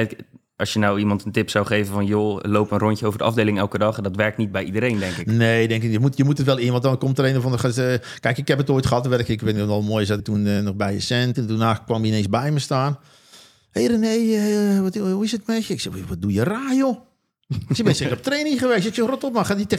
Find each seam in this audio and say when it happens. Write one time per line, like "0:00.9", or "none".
0:10.2
0:11.3